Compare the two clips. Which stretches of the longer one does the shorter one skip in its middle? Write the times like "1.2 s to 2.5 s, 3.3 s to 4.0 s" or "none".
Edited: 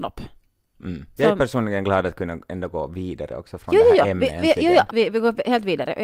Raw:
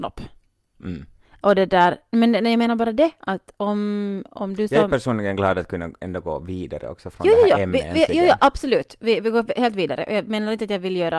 1.2 s to 4.7 s, 8.4 s to 9.0 s